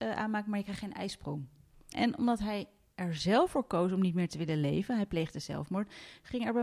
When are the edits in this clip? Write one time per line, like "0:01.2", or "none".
0:01.9